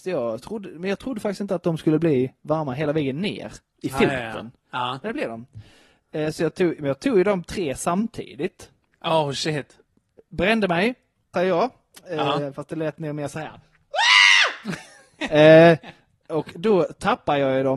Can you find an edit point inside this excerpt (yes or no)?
yes